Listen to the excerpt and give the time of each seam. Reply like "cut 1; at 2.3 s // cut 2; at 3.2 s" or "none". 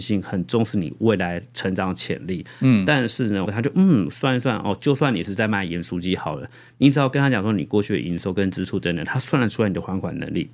cut 1; at 3.5 s

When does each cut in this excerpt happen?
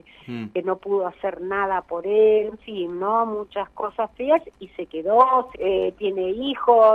cut 1; at 2.5 s // cut 2; at 5.5 s

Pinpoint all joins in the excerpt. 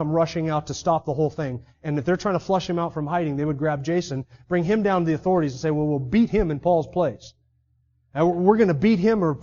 none

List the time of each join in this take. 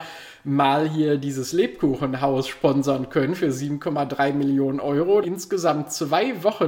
cut 1; at 5.2 s

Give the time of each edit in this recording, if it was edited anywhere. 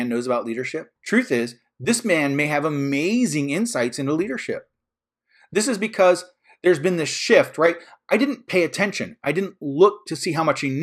cut 1; at 1.0 s

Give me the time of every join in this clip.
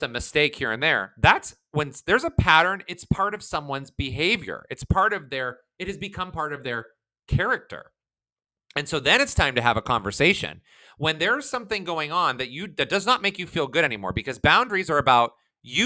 none

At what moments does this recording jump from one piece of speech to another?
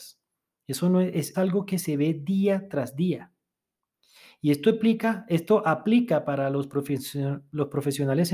cut 1; at 1.3 s

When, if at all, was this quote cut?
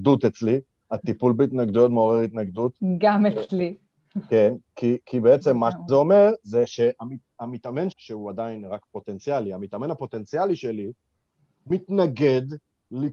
cut 1; at 7.9 s

